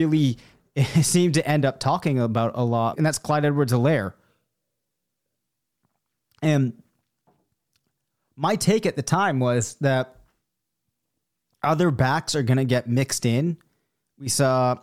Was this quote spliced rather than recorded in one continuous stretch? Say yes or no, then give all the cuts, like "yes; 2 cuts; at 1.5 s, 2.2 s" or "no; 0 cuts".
yes; 1 cut; at 2.9 s